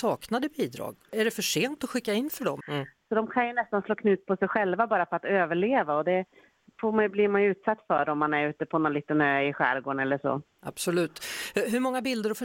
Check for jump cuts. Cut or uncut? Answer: cut